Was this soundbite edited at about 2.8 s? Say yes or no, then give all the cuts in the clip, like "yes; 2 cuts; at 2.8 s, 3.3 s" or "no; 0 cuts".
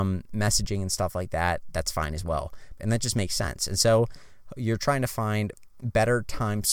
yes; 1 cut; at 2.8 s